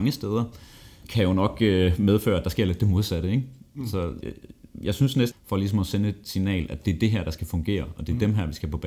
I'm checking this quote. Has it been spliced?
yes; 2 cuts; at 4.2 s, 5.3 s

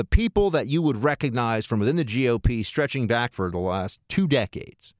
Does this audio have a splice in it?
yes; 1 cut; at 3.3 s

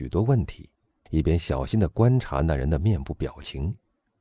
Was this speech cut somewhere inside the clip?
yes; 1 cut; at 1.1 s

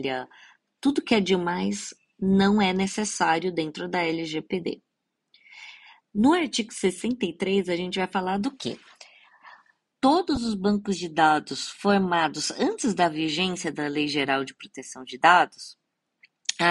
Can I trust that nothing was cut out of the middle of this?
yes; 0 cuts

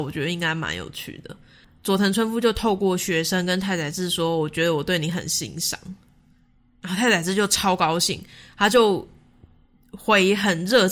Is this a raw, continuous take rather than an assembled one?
yes; 0 cuts

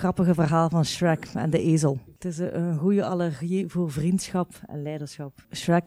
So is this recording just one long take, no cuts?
yes; 0 cuts

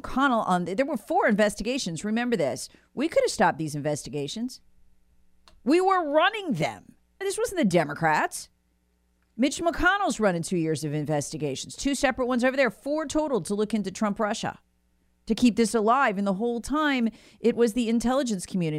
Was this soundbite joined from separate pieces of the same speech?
yes; 1 cut; at 7.2 s

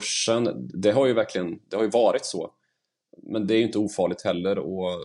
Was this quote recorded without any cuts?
yes; 0 cuts

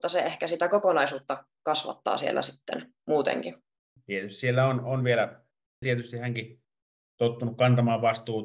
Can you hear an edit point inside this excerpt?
yes; 2 cuts; at 4.0 s, 5.8 s

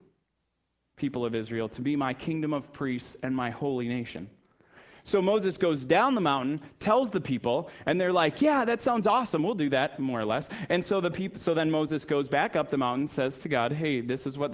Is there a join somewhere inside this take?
no; 0 cuts

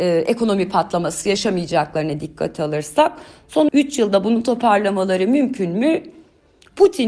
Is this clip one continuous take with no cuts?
no; 1 cut; at 3.7 s

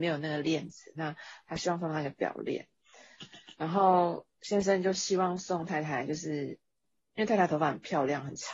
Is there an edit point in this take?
no; 0 cuts

